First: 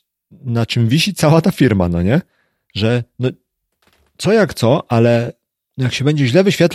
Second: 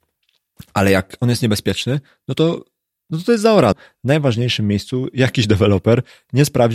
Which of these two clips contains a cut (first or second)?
second